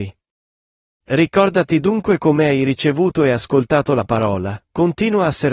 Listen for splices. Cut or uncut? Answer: cut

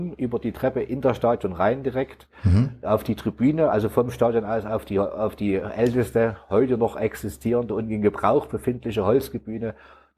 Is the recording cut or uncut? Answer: uncut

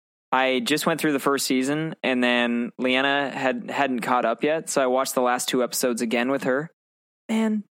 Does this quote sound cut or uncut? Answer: uncut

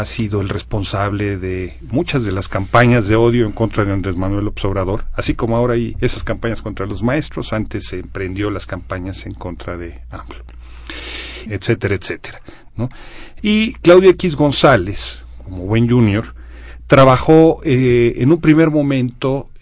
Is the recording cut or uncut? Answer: cut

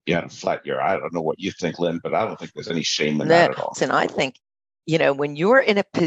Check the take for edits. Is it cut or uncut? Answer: cut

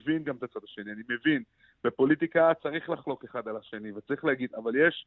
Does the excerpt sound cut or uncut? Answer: uncut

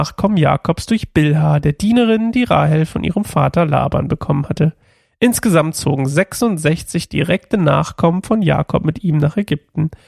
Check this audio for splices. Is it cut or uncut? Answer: uncut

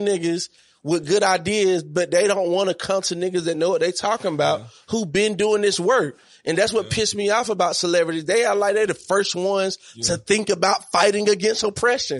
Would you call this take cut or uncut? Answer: uncut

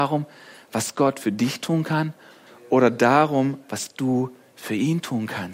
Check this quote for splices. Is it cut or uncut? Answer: uncut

